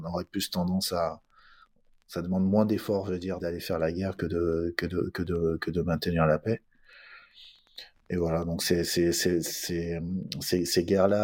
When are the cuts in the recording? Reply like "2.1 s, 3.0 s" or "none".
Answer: 3.4 s